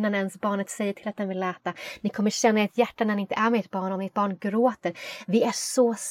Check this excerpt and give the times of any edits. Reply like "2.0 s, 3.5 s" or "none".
none